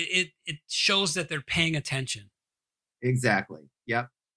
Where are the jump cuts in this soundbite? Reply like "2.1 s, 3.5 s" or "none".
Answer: 2.9 s

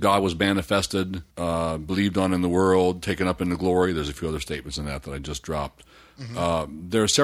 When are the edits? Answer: 1.3 s

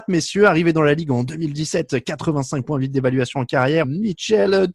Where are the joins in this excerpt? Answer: 3.8 s

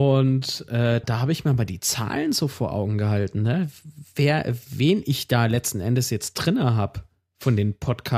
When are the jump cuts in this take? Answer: 1.0 s

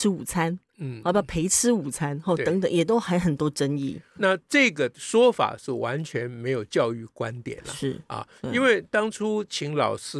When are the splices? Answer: 4.2 s

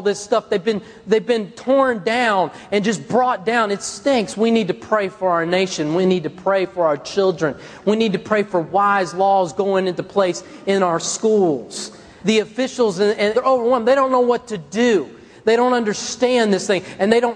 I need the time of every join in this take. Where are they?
12.2 s, 13.3 s

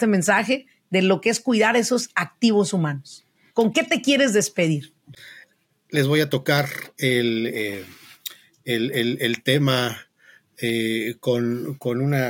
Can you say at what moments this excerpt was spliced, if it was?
none

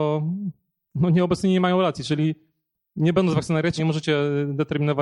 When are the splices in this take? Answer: 3.8 s

